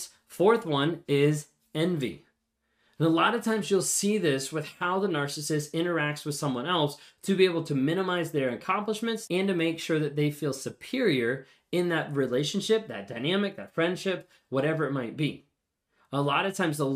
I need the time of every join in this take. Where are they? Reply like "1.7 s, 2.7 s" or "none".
9.3 s